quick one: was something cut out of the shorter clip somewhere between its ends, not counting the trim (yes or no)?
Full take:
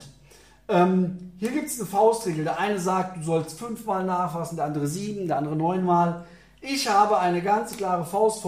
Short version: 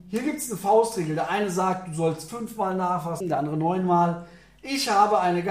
yes